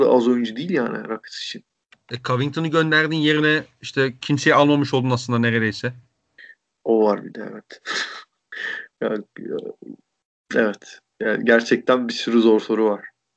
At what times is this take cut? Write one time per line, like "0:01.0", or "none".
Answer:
none